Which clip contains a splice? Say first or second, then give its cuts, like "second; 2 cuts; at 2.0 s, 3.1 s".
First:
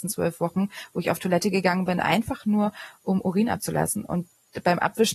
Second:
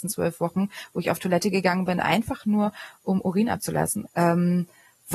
second; 1 cut; at 4.1 s